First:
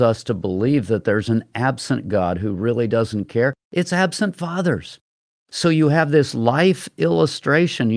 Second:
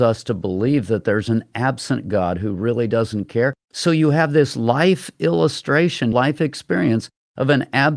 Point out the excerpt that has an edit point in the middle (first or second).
second